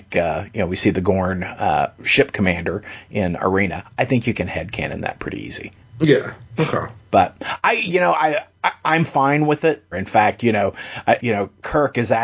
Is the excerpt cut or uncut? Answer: cut